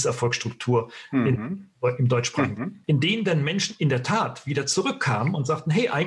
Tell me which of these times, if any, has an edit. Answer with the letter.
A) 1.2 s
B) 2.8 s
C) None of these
B